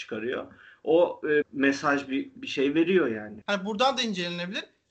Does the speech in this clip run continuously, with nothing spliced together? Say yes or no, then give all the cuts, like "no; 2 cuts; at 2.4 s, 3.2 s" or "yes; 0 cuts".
no; 2 cuts; at 1.4 s, 3.4 s